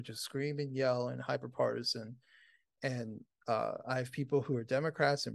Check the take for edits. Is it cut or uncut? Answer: uncut